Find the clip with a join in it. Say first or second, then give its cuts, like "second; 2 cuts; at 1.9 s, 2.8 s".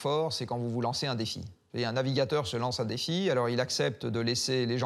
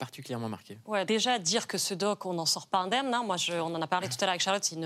second; 1 cut; at 1.1 s